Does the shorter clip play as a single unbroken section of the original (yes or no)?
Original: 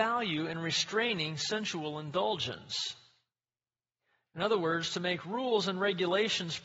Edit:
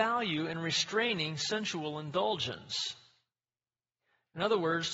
yes